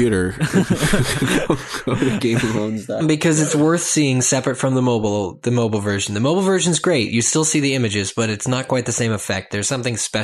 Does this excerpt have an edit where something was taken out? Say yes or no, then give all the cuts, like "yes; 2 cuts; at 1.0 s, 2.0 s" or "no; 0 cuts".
yes; 1 cut; at 3.0 s